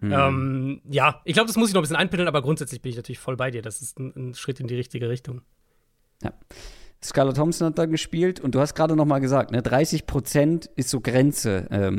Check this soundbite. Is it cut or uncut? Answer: uncut